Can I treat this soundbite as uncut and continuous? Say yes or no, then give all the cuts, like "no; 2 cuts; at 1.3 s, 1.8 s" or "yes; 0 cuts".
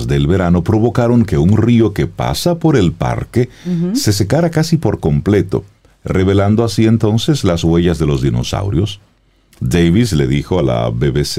yes; 0 cuts